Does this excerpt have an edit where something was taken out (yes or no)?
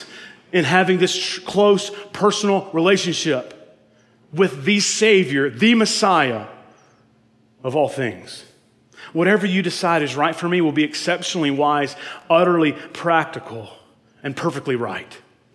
no